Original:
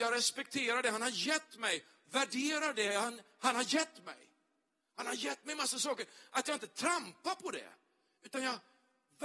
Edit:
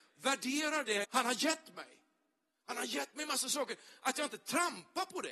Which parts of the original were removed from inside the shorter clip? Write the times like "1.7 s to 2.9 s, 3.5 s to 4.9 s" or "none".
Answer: 2.9 s to 3.3 s